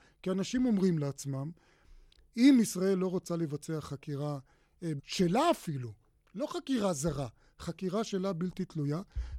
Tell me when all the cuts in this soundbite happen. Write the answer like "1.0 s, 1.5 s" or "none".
5.0 s